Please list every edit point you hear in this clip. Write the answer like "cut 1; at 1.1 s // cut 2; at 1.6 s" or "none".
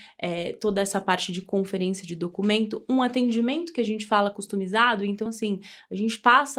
none